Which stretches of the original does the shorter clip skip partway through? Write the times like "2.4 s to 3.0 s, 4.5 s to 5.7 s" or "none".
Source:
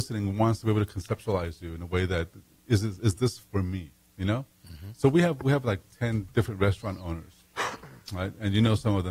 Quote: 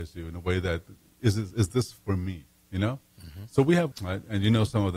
5.4 s to 8.0 s